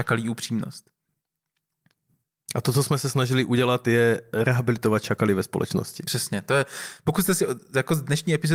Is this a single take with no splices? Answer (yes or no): yes